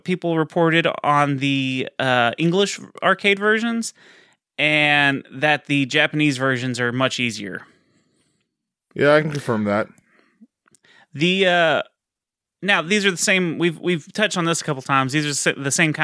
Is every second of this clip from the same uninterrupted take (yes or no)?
no